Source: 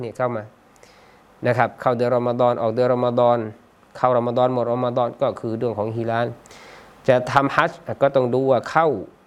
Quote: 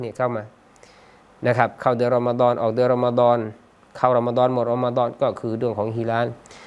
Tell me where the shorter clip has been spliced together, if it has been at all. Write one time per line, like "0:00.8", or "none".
none

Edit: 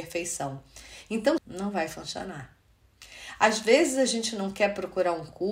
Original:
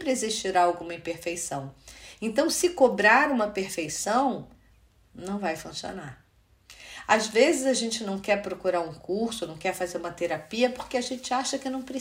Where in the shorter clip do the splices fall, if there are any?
0:01.4

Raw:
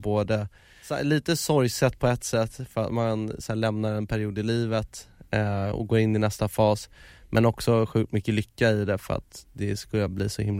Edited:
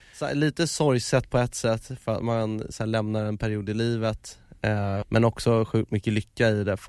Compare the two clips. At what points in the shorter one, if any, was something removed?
0:05.0

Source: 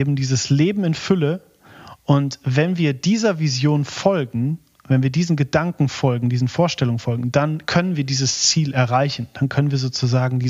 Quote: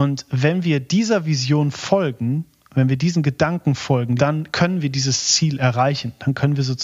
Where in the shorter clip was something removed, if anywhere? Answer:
0:04.2

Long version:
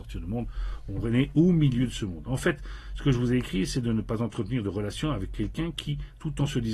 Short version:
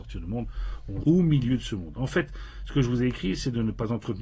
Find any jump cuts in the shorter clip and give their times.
0:01.0

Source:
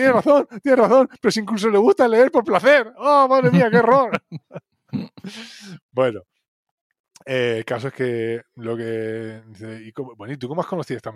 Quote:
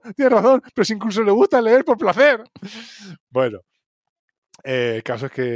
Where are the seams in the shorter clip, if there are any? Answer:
0:02.5

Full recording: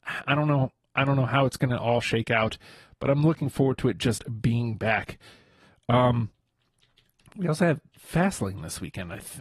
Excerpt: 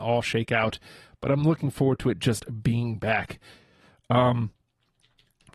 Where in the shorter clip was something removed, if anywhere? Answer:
none

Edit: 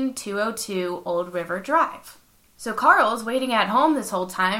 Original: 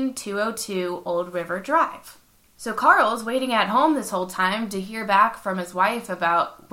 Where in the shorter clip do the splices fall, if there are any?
none

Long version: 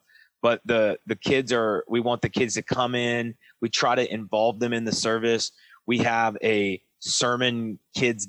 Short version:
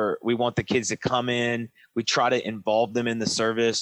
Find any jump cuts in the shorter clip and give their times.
none

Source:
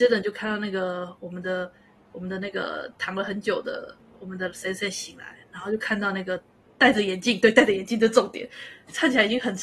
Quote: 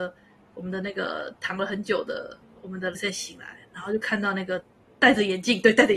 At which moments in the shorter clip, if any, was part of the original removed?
0:02.9

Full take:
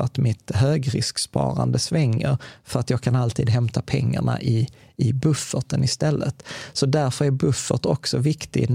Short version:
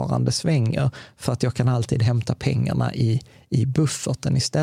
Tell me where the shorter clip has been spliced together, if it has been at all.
none

